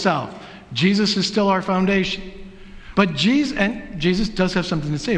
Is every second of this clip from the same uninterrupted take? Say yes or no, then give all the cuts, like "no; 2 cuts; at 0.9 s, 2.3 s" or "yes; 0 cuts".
no; 1 cut; at 2.9 s